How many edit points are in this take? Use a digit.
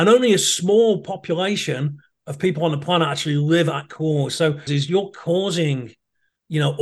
1